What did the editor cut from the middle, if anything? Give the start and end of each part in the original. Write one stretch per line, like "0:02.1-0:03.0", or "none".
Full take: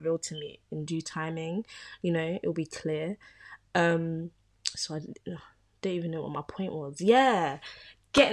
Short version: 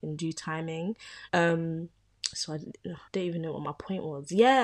0:02.0-0:03.7
0:05.5-0:05.8